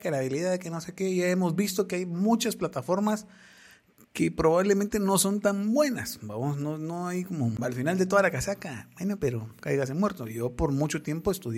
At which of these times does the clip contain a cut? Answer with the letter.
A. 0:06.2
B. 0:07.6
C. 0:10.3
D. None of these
B